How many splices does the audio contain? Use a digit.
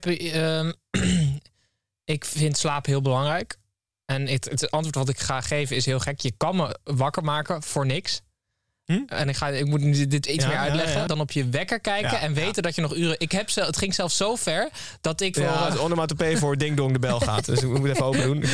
2